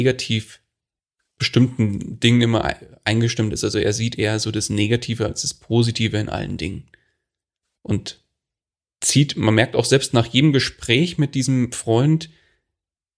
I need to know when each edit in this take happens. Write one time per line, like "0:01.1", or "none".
none